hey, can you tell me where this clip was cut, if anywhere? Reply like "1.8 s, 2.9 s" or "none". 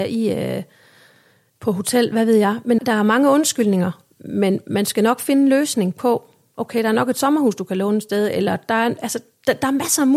2.8 s